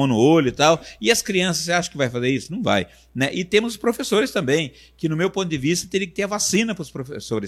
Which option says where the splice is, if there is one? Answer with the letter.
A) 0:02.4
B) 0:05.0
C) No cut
C